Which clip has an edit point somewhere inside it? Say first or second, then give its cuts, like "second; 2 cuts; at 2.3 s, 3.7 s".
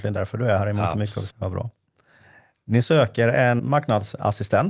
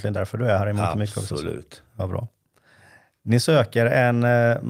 first; 2 cuts; at 1.3 s, 3.6 s